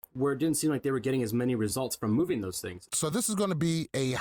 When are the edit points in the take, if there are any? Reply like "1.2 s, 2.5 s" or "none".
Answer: 2.9 s